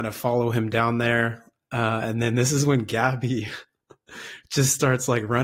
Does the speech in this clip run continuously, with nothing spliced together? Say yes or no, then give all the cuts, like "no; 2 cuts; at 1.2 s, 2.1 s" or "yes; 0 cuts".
yes; 0 cuts